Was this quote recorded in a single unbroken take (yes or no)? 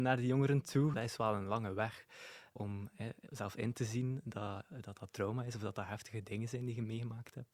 no